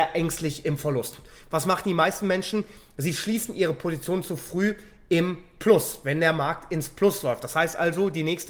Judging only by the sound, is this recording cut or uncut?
uncut